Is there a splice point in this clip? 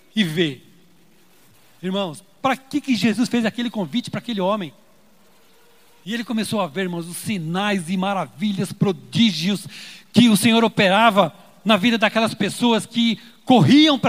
no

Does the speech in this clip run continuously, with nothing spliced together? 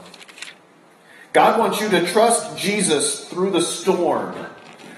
yes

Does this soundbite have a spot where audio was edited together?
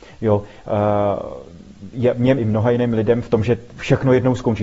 yes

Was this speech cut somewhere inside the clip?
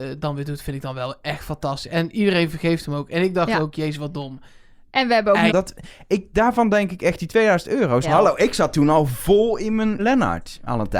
yes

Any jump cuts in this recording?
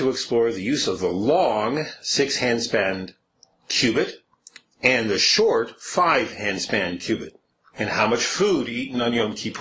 yes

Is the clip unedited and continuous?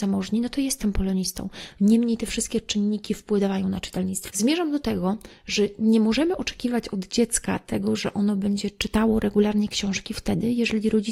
no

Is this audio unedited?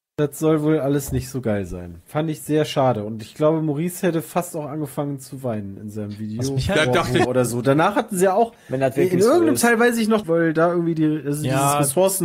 no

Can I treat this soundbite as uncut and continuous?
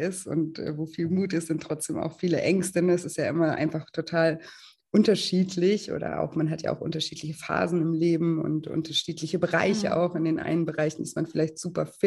yes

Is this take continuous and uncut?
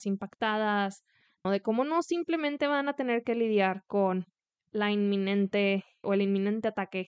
no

